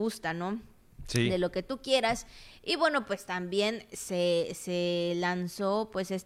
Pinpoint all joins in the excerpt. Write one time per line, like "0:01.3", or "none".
none